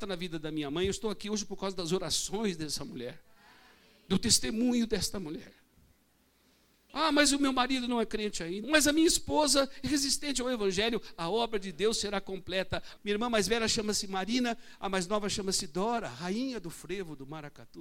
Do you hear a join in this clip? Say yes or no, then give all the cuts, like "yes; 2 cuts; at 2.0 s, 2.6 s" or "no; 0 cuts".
yes; 3 cuts; at 6.9 s, 8.6 s, 13.0 s